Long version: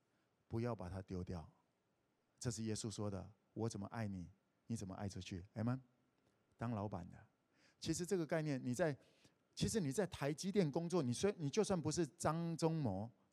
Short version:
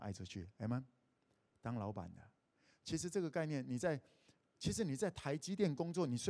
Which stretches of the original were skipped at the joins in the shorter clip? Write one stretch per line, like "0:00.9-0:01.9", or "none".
none